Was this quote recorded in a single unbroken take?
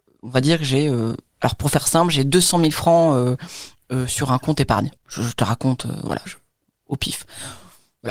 no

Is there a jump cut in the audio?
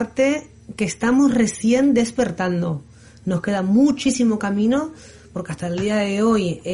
yes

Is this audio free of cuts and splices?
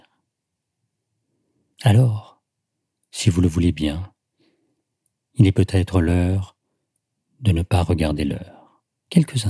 yes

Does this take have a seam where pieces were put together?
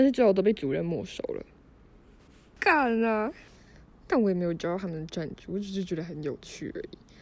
yes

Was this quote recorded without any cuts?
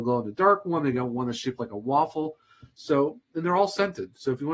yes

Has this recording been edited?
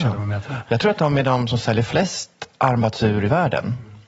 no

